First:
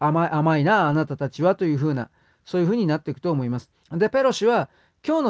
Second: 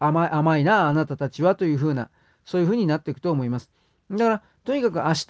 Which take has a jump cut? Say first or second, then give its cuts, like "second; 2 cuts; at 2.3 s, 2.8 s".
first; 1 cut; at 3.8 s